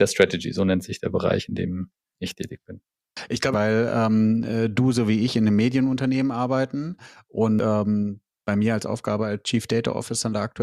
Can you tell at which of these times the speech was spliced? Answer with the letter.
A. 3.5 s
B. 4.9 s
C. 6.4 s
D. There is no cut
A